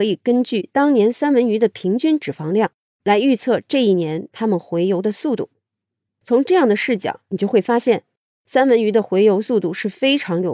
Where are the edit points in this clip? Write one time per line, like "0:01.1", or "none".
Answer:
none